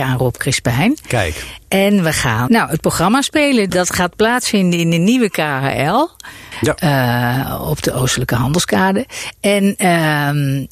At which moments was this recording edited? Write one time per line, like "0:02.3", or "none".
0:02.5
0:03.7
0:06.5